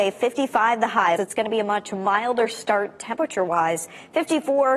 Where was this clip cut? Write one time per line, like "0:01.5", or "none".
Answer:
0:01.2